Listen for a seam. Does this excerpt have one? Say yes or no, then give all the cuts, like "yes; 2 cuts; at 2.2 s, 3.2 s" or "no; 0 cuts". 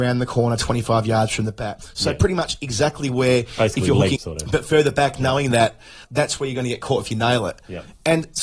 yes; 2 cuts; at 4.2 s, 6.0 s